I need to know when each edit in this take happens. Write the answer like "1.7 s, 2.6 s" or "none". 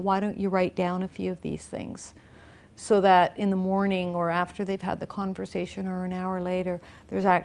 none